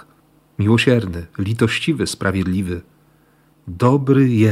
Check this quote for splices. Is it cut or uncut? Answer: cut